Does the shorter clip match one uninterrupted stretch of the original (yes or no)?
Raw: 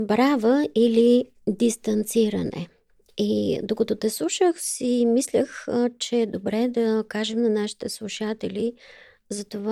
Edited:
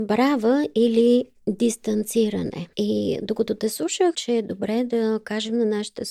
no